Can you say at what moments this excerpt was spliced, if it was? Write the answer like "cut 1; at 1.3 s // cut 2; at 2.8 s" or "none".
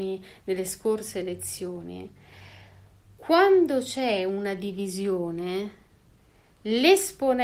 none